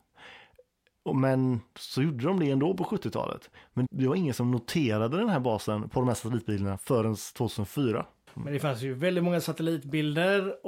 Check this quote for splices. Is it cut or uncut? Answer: cut